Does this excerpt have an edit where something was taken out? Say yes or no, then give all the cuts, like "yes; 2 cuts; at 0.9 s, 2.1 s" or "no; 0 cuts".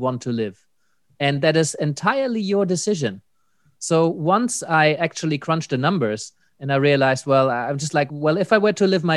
no; 0 cuts